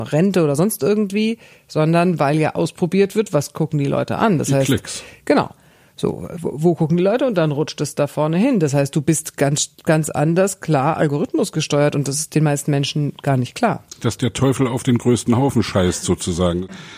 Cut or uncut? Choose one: uncut